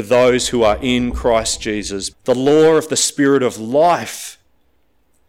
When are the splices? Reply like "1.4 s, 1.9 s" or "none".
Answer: 2.1 s